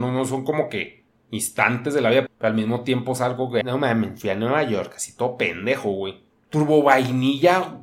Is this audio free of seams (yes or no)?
no